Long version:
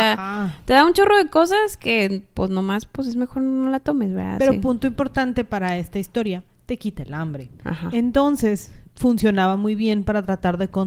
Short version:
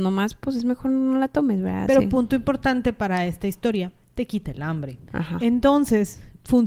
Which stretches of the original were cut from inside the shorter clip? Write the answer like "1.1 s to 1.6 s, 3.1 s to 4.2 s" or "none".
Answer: none